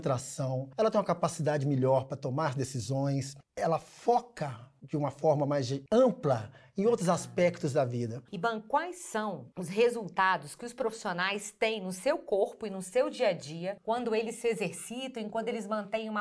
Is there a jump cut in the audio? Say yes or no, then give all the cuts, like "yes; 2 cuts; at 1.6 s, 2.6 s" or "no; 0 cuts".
yes; 2 cuts; at 8.2 s, 9.5 s